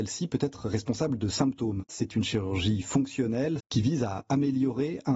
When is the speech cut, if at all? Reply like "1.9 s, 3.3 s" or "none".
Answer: 1.9 s, 3.6 s